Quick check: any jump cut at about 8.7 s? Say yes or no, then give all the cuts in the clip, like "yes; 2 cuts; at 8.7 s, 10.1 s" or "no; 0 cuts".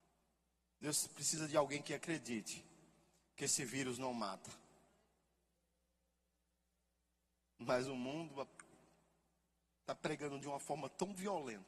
no; 0 cuts